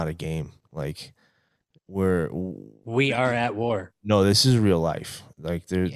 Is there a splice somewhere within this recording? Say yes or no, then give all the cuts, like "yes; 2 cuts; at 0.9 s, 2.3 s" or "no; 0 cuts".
no; 0 cuts